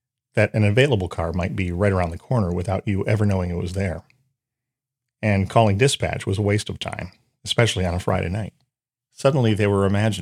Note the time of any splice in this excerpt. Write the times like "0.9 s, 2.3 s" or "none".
9.0 s